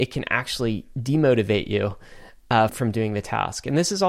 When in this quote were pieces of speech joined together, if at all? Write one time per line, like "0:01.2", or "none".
0:02.7